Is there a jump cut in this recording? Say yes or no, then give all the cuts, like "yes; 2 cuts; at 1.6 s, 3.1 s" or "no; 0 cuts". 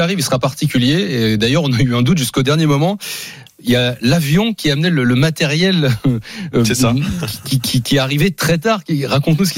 no; 0 cuts